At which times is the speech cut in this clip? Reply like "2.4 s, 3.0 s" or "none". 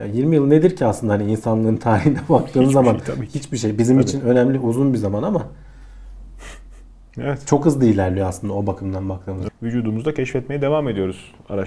9.5 s